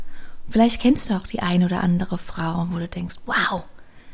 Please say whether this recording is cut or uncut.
uncut